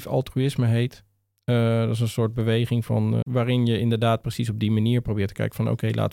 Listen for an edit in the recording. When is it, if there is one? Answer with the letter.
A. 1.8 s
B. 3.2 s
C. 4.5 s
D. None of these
B